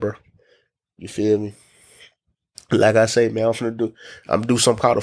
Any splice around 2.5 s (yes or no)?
no